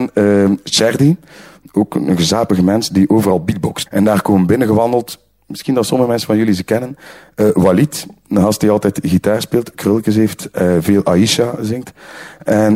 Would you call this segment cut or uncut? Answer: cut